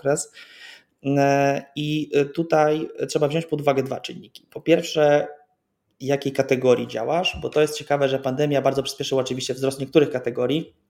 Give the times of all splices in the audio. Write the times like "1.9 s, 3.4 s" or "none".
none